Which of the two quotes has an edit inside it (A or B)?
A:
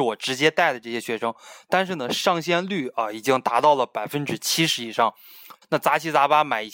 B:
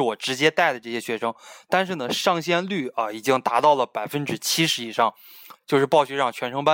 A